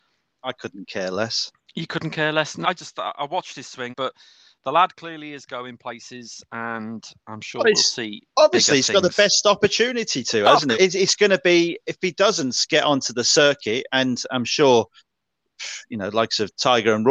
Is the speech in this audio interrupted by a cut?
yes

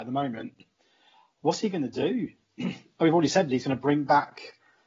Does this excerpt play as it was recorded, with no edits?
yes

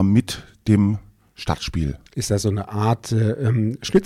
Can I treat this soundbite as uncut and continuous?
no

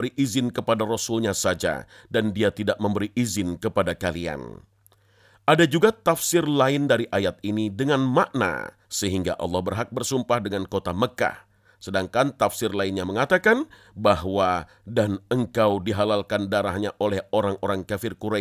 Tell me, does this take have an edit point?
yes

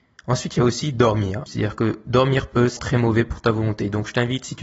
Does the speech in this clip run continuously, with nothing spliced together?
no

